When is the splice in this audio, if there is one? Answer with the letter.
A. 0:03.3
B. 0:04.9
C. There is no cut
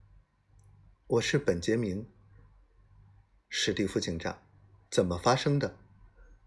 B